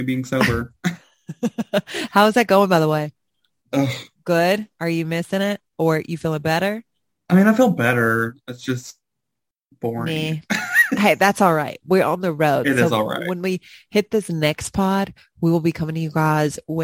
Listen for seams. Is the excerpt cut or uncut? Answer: uncut